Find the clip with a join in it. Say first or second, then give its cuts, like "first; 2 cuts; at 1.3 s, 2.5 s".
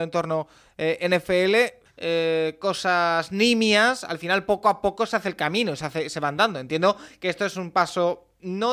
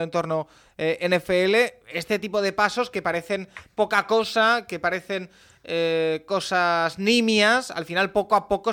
first; 1 cut; at 1.9 s